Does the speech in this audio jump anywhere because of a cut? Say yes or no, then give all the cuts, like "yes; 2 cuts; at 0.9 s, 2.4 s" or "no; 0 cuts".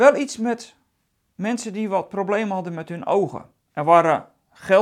yes; 1 cut; at 3.6 s